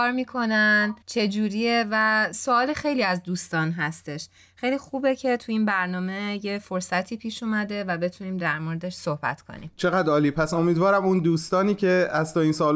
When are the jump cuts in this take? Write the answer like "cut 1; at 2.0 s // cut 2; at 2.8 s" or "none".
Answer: cut 1; at 1.0 s